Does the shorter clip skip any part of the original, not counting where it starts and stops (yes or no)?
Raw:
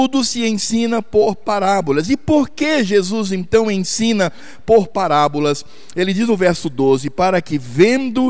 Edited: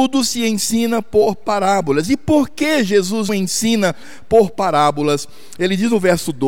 yes